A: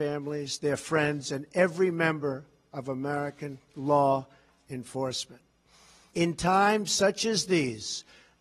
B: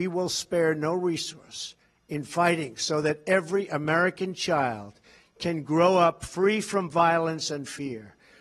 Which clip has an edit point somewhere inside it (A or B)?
A